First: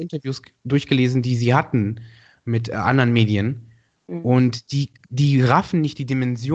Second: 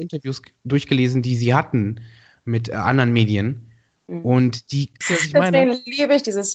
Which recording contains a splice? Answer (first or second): second